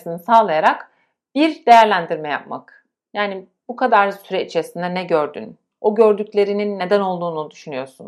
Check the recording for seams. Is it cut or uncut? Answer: uncut